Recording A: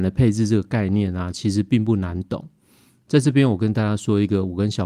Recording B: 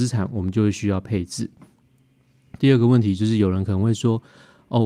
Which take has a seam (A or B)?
B